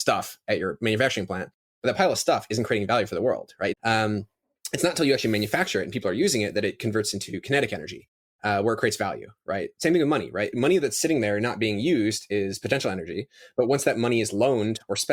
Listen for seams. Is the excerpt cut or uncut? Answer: cut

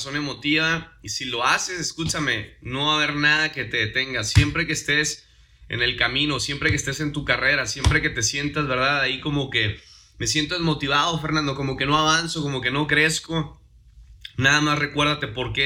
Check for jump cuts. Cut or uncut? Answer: uncut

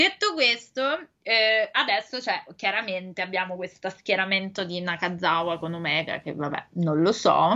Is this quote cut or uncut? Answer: uncut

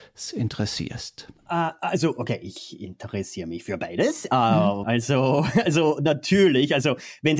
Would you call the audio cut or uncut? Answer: cut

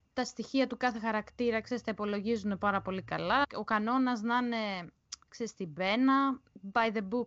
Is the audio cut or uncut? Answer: cut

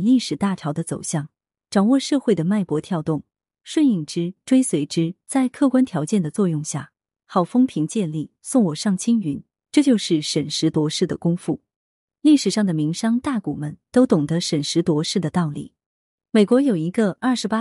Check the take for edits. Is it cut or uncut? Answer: uncut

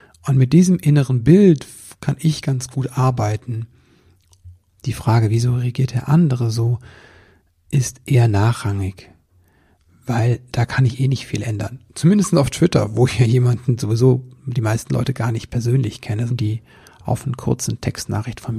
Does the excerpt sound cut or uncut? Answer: cut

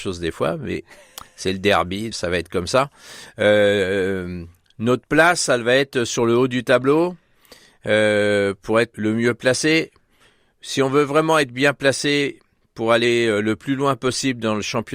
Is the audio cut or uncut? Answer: cut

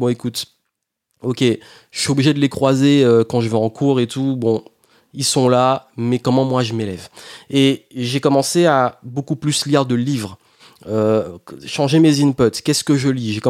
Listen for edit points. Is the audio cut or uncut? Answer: uncut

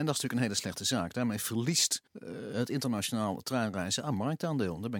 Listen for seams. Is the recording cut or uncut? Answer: cut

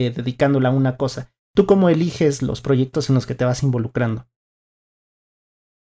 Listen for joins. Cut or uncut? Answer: uncut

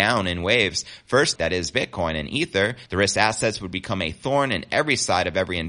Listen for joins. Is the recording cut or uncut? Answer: cut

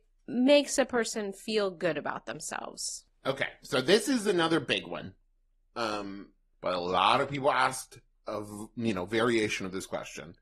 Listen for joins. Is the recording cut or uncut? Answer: cut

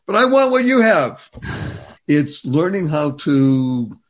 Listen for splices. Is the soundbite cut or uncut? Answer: cut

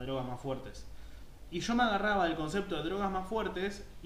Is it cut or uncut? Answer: uncut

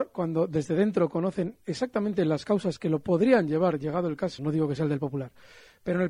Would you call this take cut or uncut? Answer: cut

